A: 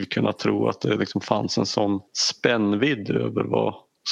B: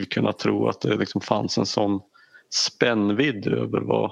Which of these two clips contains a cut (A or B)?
A